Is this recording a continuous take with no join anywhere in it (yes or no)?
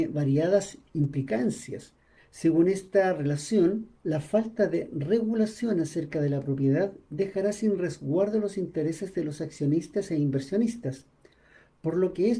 no